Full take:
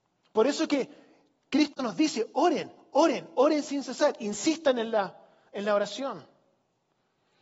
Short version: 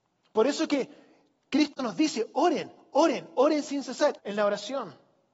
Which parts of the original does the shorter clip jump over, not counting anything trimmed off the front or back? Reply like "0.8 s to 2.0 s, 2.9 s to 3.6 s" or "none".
4.2 s to 5.5 s

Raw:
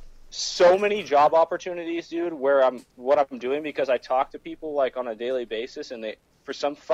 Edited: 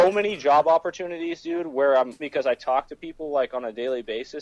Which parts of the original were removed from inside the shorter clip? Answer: 2.9 s to 3.6 s

